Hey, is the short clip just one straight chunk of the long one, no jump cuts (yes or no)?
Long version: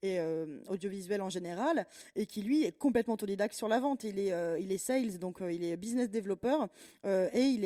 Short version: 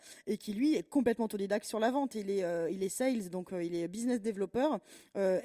yes